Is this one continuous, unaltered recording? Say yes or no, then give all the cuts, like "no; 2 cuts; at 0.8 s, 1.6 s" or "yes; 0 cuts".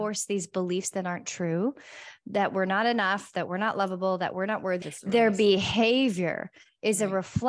no; 1 cut; at 4.8 s